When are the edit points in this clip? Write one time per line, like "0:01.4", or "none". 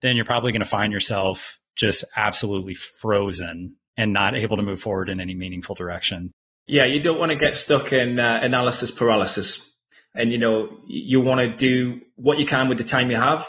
none